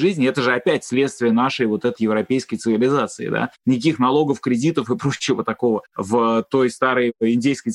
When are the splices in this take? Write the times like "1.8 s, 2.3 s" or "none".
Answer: 2.0 s